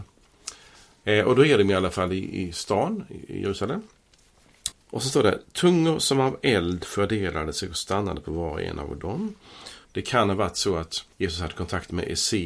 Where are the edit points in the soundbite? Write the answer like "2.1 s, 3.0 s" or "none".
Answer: 4.7 s, 9.9 s, 11.1 s